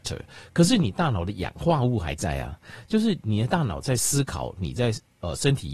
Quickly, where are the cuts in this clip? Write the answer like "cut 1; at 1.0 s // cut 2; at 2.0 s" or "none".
none